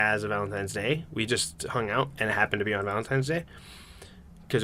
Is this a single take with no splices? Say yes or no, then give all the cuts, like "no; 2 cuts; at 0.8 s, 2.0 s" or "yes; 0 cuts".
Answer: yes; 0 cuts